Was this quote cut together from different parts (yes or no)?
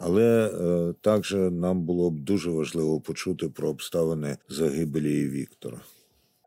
yes